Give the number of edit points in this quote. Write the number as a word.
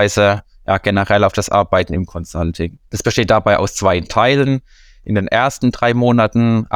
one